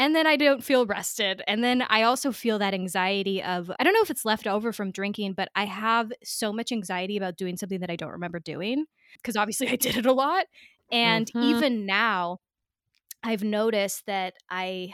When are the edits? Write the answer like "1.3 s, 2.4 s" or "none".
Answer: 3.7 s